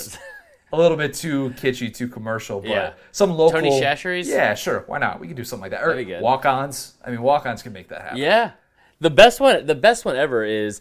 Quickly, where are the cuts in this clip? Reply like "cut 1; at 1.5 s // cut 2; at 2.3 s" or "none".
none